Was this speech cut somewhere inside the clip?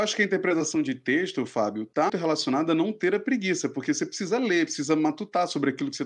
yes; 1 cut; at 2.1 s

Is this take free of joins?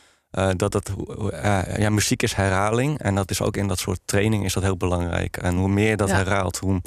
yes; 0 cuts

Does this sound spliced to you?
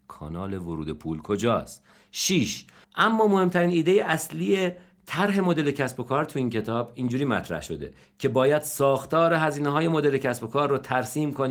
yes; 1 cut; at 2.8 s

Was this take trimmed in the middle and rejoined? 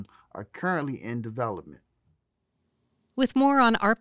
no; 0 cuts

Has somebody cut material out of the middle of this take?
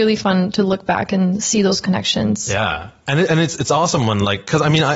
no; 0 cuts

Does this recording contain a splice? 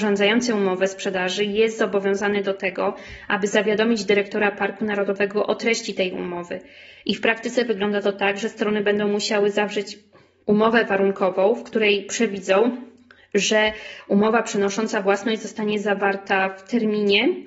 no; 0 cuts

